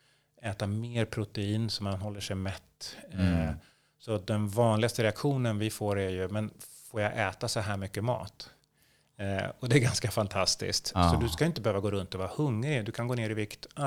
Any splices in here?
no; 0 cuts

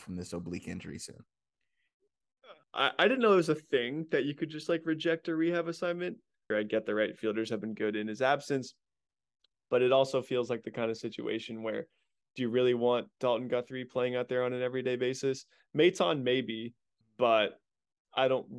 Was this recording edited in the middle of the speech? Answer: yes; 3 cuts; at 2.6 s, 6.5 s, 17.0 s

